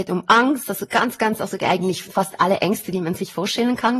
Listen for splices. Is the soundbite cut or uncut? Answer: uncut